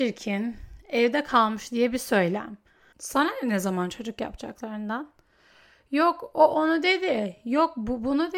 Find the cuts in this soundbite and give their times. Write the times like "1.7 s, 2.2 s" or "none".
2.9 s